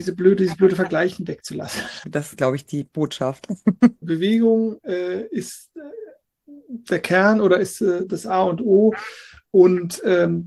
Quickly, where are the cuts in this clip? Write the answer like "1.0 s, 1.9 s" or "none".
2.0 s, 4.0 s